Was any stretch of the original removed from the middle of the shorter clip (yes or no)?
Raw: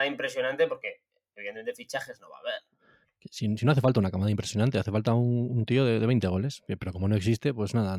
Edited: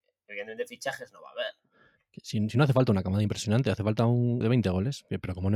yes